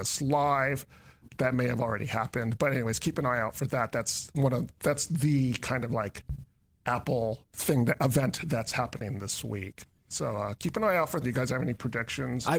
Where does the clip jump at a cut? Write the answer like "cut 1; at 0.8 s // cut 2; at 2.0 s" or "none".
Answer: cut 1; at 1.3 s // cut 2; at 11.2 s